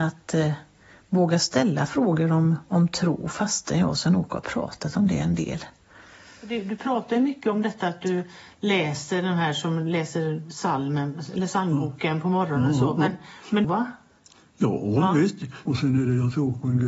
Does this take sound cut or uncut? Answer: cut